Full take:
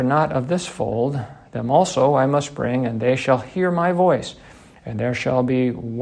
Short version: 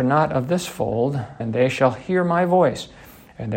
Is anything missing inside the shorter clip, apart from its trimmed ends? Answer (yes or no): yes